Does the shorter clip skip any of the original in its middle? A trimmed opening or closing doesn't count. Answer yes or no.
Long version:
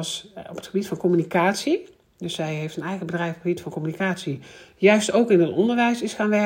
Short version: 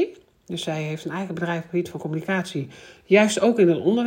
no